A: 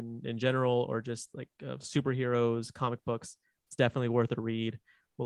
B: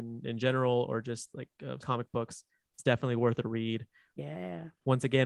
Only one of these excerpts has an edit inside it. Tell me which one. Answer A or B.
B